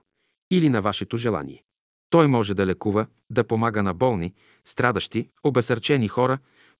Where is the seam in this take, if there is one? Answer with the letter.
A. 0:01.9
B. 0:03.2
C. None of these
A